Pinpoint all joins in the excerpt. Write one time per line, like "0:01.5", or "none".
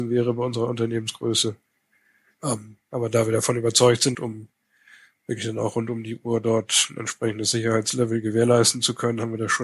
0:02.3
0:04.1